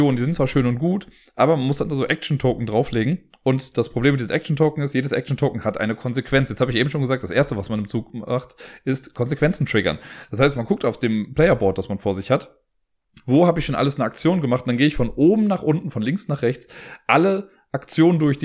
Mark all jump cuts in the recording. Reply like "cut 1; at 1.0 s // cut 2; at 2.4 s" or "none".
none